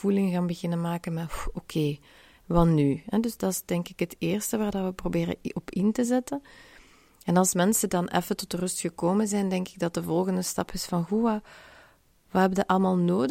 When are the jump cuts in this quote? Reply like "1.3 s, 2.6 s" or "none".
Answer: none